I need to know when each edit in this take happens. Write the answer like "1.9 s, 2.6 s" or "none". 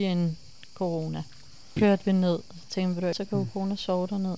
1.8 s, 3.1 s